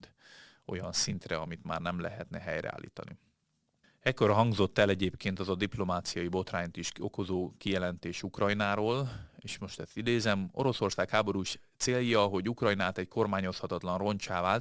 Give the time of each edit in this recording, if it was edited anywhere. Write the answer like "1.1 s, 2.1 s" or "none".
3.8 s